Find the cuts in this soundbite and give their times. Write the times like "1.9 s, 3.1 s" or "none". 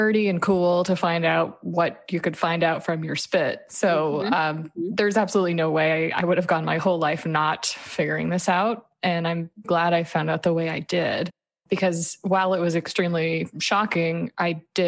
9.6 s